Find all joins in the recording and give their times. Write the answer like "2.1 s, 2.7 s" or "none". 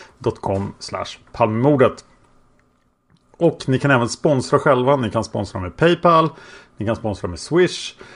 none